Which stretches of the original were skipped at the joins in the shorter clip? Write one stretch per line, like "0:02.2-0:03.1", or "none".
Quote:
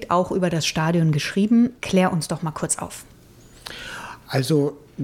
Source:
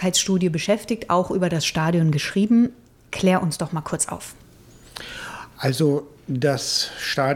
0:02.8-0:03.1